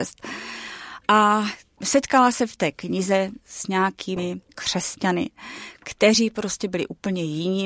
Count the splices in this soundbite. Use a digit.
1